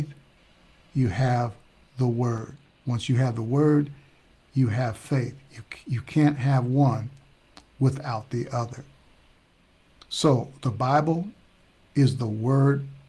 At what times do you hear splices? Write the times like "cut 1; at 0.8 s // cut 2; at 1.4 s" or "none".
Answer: none

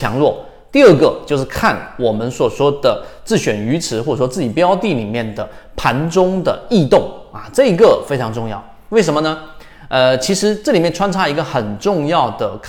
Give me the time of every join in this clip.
none

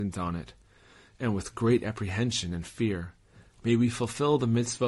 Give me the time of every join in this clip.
cut 1; at 3.5 s

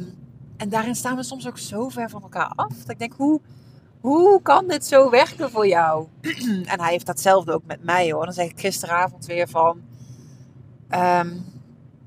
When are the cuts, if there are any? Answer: none

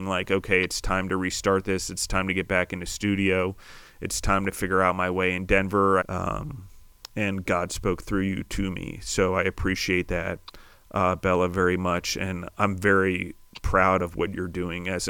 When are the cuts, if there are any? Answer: cut 1; at 6.0 s

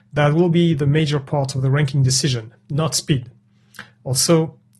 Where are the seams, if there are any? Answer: none

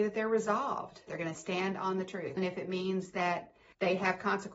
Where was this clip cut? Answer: cut 1; at 1.1 s // cut 2; at 2.4 s

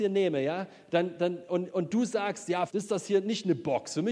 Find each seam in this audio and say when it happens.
cut 1; at 2.7 s

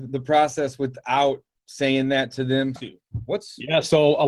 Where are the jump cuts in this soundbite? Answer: cut 1; at 2.8 s

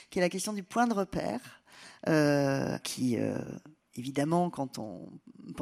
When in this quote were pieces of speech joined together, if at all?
cut 1; at 2.8 s

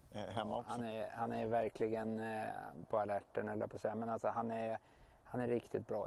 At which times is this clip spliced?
none

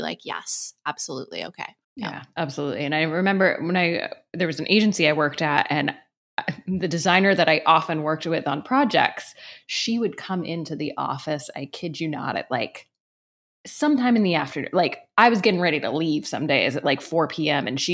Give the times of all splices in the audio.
cut 1; at 1.8 s

